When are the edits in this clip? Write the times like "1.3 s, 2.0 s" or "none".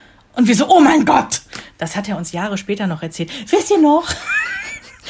1.7 s